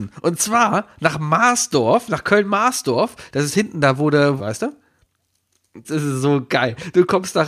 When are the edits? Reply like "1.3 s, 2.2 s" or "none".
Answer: 4.4 s, 5.8 s